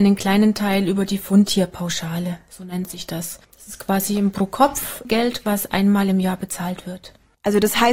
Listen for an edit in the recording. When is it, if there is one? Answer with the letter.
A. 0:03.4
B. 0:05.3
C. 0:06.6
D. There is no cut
A